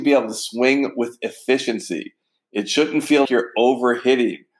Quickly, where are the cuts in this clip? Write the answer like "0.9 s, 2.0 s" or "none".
3.2 s